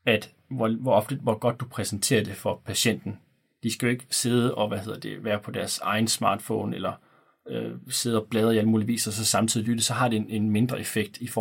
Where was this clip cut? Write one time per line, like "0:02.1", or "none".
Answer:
none